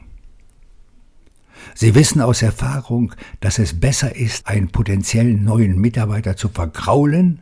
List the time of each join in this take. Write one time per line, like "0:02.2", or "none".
0:04.4